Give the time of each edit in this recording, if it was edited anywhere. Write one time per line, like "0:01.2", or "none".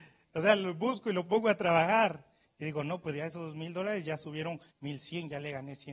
0:04.7